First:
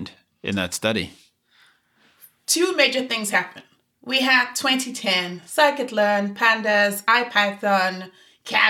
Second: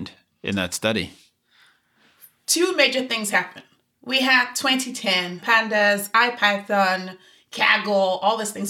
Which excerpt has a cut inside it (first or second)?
second